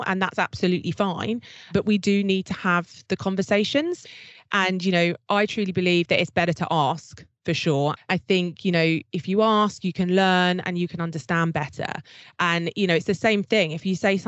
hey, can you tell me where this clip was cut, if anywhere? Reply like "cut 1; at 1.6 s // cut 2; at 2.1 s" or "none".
cut 1; at 8.0 s